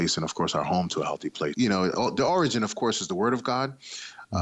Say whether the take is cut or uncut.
cut